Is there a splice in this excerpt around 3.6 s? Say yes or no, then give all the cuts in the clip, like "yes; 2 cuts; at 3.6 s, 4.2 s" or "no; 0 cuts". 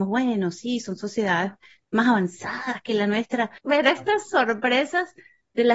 yes; 1 cut; at 3.6 s